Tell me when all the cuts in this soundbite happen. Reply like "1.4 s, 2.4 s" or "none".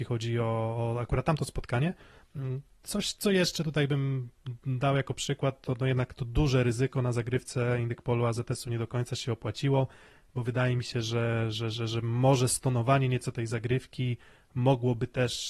none